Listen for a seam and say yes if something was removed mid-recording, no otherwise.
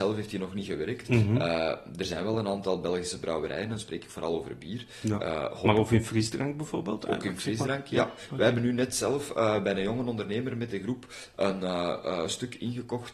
no